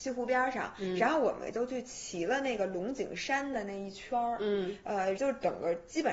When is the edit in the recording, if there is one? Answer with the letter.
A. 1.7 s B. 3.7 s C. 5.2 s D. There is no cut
C